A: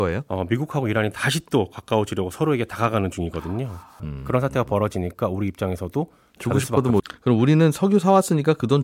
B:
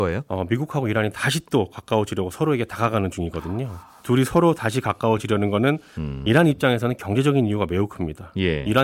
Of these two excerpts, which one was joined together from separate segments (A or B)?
A